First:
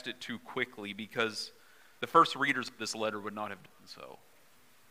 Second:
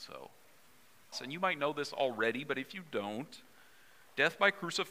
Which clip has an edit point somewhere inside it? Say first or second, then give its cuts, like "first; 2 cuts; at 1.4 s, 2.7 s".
second; 1 cut; at 1.1 s